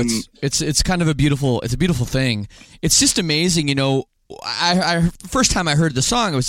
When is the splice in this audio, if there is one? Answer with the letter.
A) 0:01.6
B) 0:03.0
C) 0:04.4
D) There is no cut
D